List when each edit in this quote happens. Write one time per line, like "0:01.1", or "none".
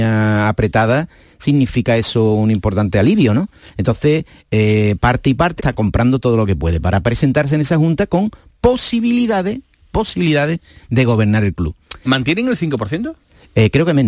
0:05.6
0:12.1